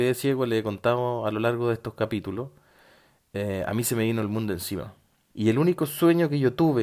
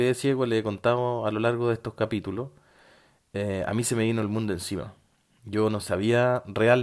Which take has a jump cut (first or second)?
first